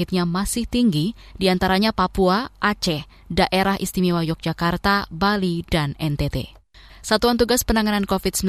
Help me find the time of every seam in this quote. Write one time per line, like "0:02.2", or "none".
0:06.9